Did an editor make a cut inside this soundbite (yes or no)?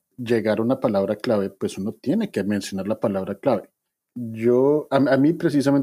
yes